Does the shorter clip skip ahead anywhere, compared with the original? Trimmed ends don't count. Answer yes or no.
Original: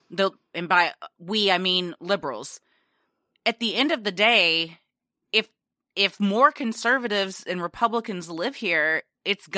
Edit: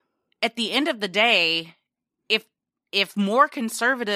no